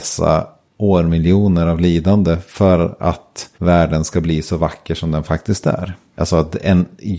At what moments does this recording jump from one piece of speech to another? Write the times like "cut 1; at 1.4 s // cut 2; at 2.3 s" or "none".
cut 1; at 3.5 s // cut 2; at 6.1 s

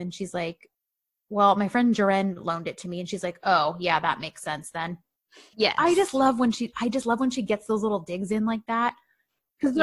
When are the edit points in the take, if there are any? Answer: cut 1; at 5.5 s

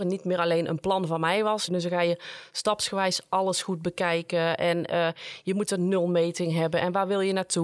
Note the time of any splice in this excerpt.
cut 1; at 1.7 s

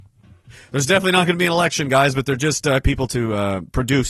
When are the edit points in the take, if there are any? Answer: cut 1; at 2.8 s

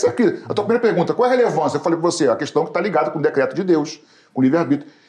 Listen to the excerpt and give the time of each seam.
none

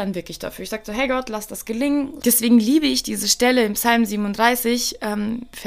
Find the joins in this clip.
cut 1; at 2.2 s

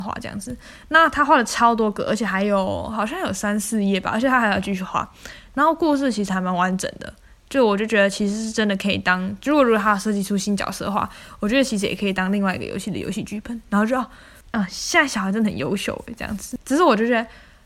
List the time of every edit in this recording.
none

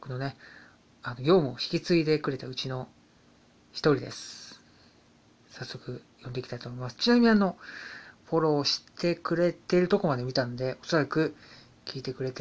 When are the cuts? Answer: cut 1; at 8.2 s // cut 2; at 9.6 s

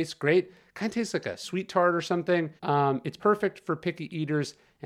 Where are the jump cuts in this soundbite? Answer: cut 1; at 2.6 s

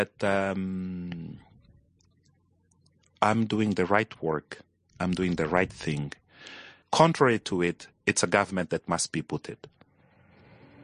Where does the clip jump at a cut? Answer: cut 1; at 6.8 s

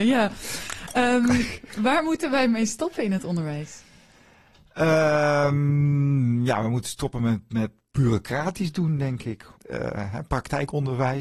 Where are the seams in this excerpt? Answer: cut 1; at 9.5 s

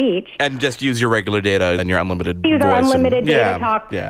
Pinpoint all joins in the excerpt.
cut 1; at 1.8 s

